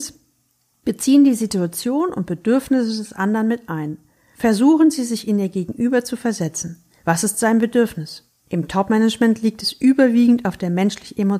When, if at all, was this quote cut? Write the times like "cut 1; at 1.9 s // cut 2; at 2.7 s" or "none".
none